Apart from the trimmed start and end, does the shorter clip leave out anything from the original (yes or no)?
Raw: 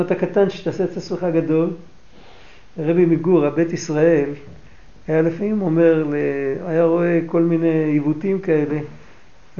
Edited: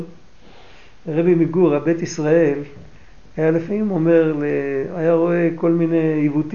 no